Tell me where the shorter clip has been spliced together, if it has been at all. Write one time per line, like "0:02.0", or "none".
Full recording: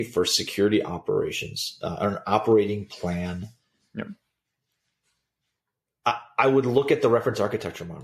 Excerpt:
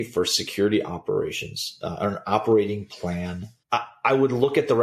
0:03.6